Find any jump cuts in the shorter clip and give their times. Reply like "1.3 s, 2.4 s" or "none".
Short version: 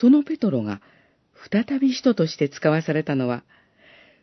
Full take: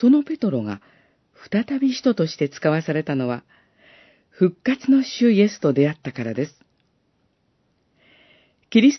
none